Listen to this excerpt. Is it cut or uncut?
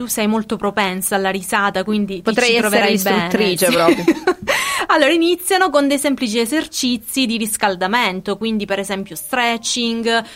uncut